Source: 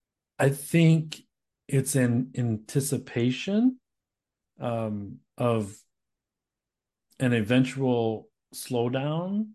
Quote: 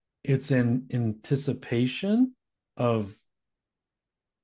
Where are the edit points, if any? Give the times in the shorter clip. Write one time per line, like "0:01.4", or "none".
0:02.7